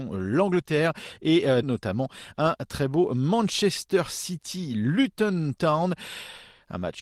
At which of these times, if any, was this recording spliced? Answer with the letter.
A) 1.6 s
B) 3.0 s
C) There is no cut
A